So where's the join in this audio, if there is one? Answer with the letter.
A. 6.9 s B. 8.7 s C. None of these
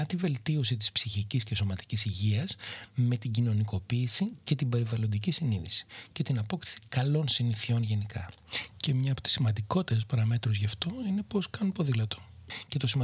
B